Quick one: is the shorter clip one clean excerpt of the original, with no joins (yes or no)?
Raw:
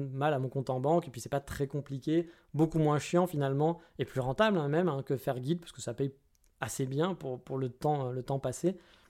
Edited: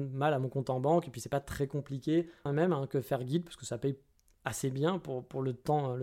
no